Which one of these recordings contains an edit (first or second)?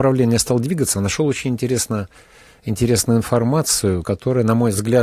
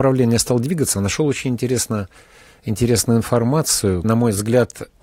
second